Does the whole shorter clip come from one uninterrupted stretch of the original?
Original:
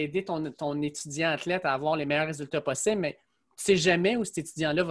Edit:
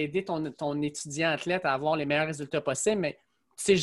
yes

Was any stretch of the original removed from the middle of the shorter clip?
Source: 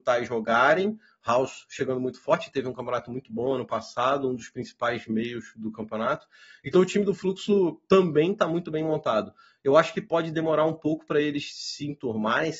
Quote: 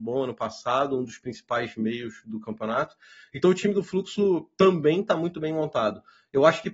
no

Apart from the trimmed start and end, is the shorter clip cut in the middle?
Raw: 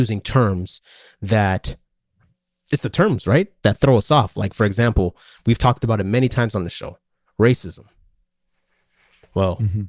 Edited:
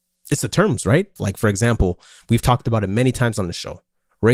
yes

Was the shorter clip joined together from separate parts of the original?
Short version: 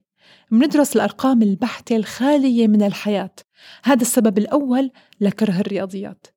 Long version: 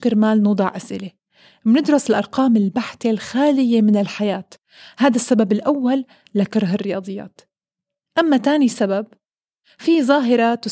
no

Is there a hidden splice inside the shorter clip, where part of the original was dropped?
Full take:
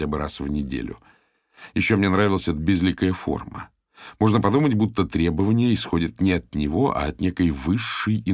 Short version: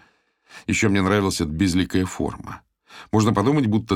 no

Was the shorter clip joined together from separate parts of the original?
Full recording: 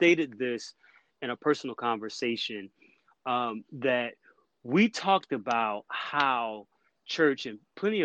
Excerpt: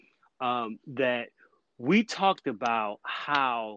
no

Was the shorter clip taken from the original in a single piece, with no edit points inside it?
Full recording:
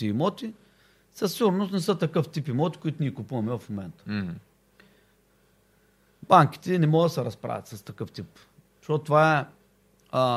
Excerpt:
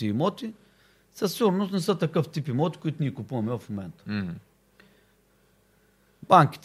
yes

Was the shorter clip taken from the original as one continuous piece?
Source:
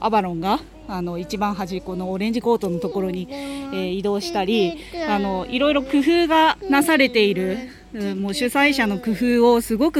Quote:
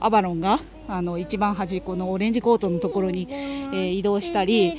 yes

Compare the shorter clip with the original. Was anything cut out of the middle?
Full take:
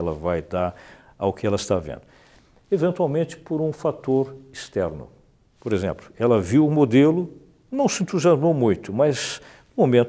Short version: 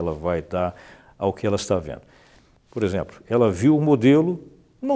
yes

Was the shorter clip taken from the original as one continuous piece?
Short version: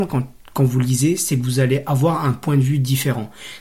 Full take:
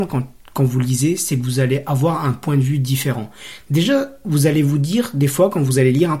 yes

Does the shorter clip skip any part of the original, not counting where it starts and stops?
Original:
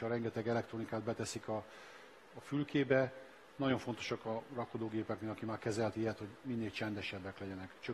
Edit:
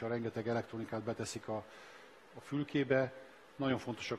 no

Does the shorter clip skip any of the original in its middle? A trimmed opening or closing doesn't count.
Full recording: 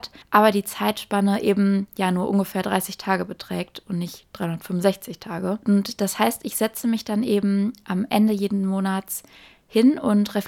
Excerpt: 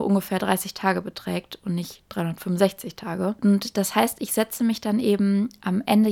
no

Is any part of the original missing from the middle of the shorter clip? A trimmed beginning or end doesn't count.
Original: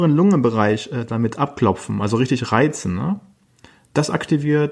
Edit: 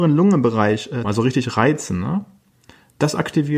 yes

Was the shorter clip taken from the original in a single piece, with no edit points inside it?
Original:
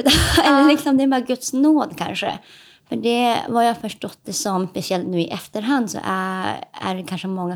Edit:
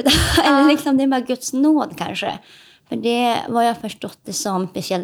yes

